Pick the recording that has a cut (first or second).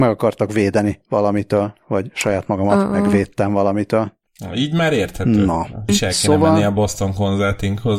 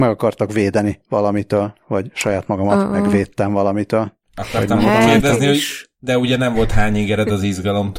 first